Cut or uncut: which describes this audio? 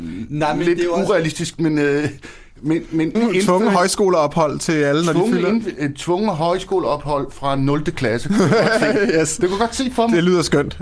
cut